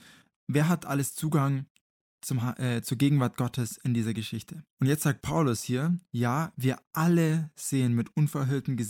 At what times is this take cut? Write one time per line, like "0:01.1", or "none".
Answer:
0:04.7